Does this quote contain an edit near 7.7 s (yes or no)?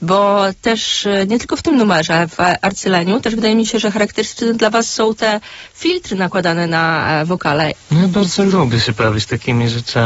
yes